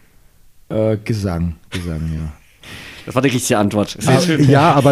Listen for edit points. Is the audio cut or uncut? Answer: uncut